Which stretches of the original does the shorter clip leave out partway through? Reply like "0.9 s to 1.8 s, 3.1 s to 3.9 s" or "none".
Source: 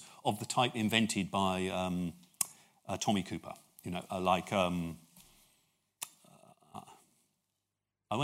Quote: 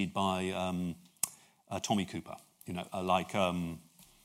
none